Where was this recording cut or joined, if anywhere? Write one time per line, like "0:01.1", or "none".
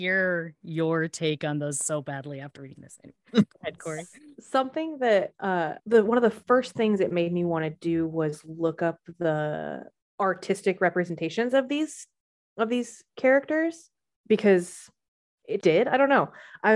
0:05.8
0:15.6